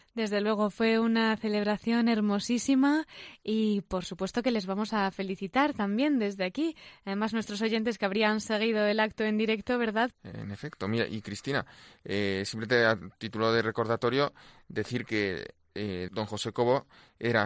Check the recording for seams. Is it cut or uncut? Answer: cut